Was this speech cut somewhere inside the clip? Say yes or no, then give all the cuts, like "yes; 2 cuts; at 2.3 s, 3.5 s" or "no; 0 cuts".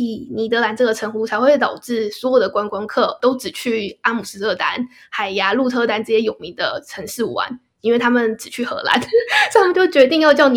no; 0 cuts